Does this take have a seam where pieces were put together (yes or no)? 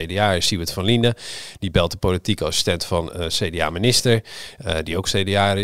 no